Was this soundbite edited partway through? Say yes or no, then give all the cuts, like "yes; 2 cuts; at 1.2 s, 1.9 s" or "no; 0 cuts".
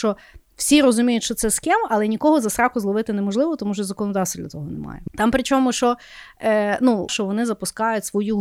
yes; 2 cuts; at 5.1 s, 7.1 s